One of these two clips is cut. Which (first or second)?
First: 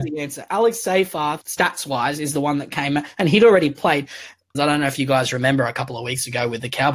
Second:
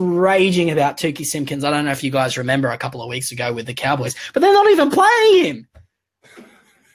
first